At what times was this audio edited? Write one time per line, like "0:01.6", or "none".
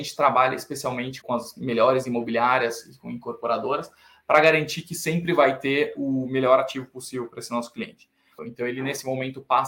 0:01.2
0:08.4